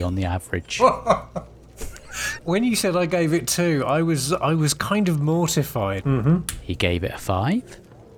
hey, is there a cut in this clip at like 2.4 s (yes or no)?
yes